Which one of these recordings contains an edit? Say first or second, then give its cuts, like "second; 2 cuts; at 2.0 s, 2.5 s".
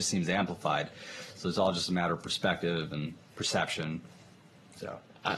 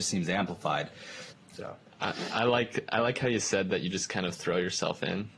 second; 1 cut; at 1.3 s